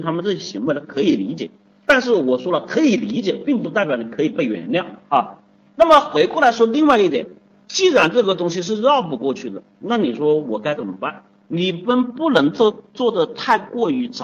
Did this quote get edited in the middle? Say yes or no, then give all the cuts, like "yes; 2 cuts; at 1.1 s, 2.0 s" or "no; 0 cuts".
yes; 1 cut; at 11.5 s